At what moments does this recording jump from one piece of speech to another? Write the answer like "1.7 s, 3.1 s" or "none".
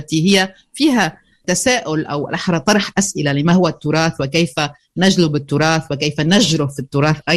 none